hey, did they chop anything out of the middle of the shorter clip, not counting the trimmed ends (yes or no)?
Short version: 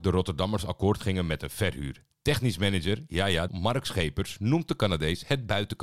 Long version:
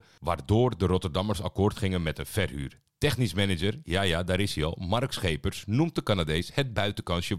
yes